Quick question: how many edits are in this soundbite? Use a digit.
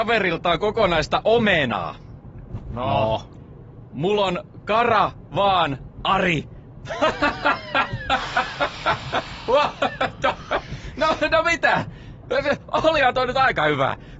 0